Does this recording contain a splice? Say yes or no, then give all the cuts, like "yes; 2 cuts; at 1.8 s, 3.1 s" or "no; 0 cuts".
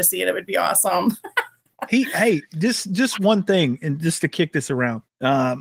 yes; 1 cut; at 3.1 s